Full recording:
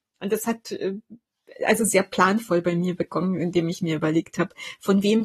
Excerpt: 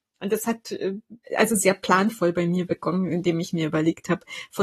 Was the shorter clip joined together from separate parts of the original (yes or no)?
yes